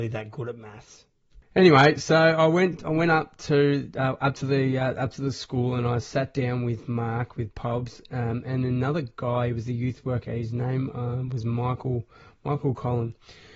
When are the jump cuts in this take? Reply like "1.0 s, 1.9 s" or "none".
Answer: none